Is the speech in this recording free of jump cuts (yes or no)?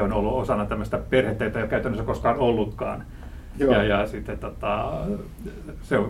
yes